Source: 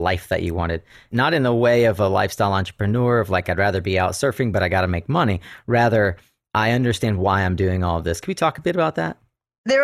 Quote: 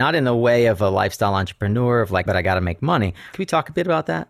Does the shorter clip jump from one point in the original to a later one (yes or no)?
yes